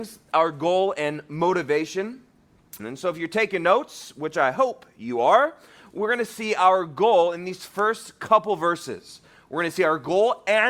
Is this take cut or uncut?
cut